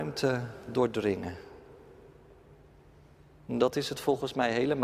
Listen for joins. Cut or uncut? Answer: uncut